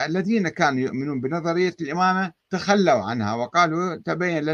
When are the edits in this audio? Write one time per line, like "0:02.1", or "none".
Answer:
0:02.4

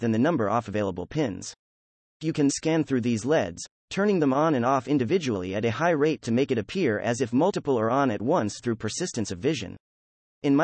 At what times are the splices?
0:02.5

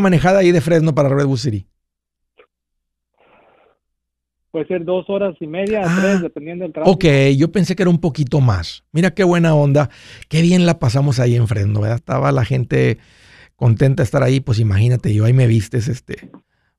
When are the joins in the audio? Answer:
0:12.0

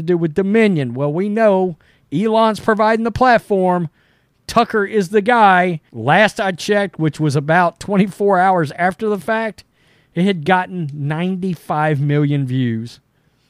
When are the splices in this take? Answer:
0:05.9

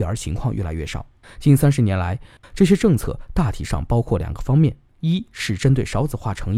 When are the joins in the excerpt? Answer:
0:01.2
0:02.4

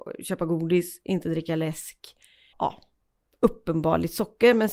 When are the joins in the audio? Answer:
0:02.5

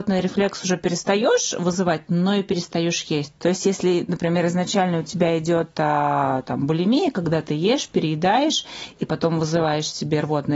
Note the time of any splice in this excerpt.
0:03.4

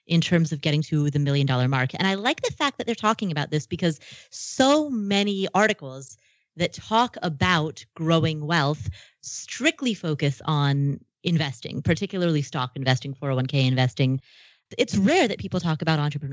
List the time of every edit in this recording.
none

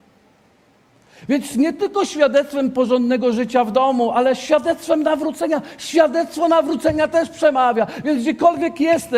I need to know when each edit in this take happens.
none

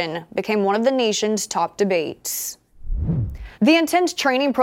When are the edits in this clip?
0:03.5

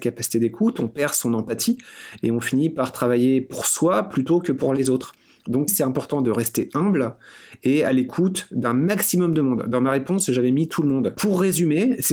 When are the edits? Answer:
0:05.7
0:11.1

